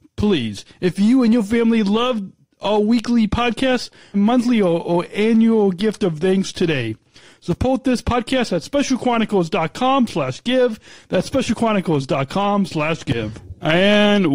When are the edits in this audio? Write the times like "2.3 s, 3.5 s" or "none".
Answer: 4.1 s

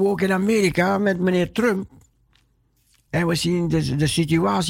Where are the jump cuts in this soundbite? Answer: none

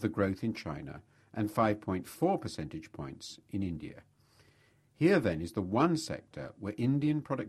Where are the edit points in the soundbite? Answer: none

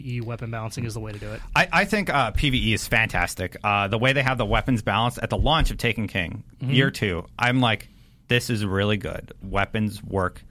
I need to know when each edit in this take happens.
none

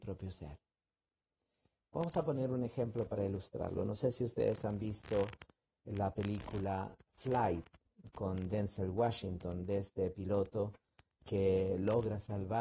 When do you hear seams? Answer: none

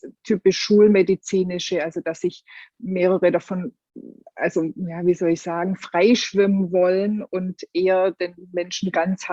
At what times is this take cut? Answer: none

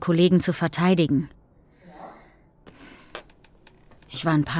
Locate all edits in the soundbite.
none

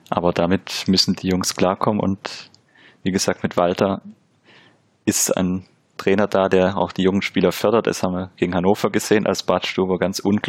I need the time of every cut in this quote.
1.2 s

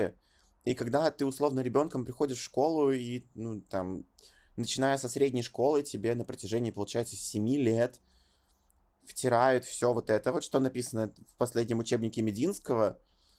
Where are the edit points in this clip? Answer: none

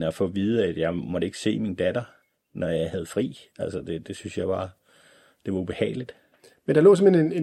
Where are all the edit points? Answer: none

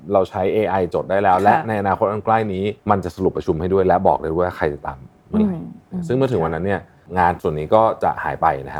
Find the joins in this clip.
2.8 s

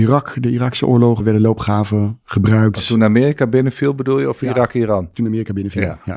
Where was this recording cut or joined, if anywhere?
1.2 s

